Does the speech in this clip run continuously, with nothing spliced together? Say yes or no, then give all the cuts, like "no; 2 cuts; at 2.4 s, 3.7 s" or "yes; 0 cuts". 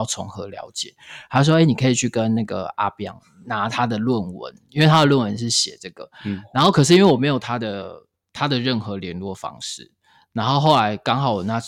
yes; 0 cuts